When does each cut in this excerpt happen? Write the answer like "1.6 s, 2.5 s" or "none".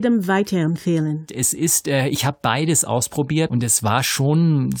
1.3 s, 3.5 s